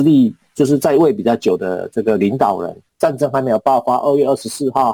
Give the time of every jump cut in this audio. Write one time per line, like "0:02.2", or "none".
0:02.9